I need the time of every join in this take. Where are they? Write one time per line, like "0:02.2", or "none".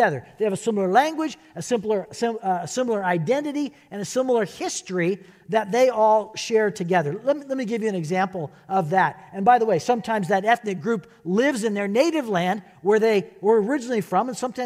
none

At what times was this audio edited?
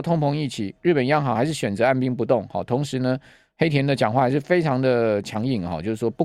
none

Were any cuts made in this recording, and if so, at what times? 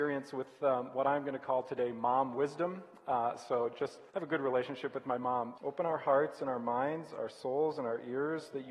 0:04.1
0:05.6

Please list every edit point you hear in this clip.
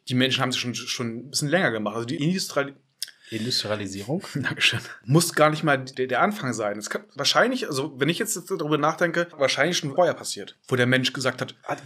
none

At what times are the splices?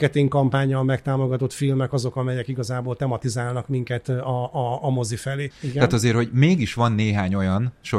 0:05.5

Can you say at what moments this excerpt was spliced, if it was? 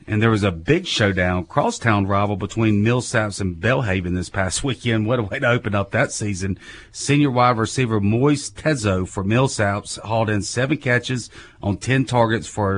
none

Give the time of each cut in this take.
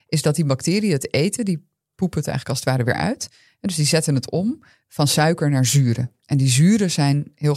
none

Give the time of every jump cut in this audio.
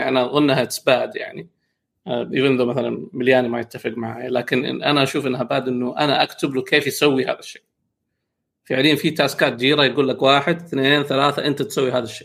none

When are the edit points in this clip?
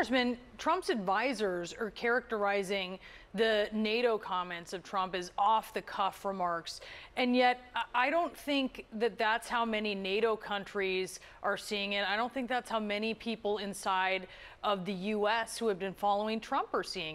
none

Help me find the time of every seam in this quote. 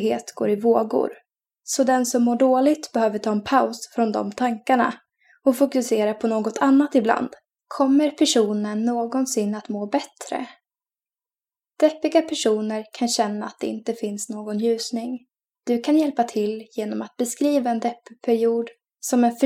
0:07.5
0:15.5

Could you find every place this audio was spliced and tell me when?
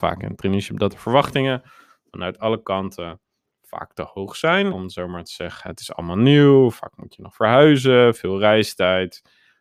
0:04.7

